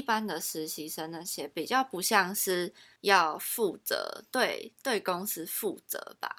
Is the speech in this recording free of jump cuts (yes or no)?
yes